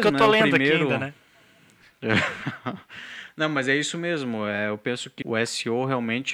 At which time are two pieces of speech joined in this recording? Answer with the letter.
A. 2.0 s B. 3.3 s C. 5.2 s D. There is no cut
C